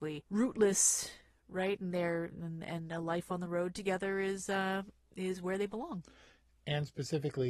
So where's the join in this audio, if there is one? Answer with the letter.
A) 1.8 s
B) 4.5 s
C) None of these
C